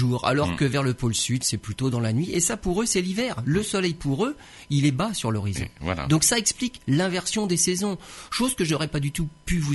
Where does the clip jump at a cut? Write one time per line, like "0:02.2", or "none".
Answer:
none